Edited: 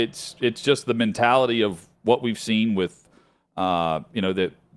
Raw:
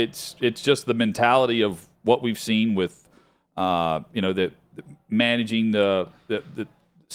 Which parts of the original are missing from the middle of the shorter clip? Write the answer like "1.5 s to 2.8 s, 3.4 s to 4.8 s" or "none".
none